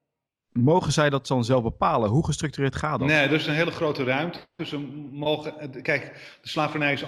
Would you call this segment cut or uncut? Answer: uncut